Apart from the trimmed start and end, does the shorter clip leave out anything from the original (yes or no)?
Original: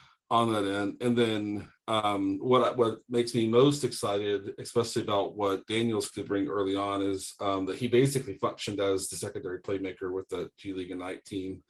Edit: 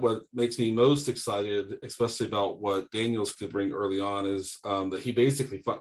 no